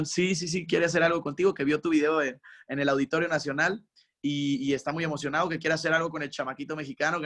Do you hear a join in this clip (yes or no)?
no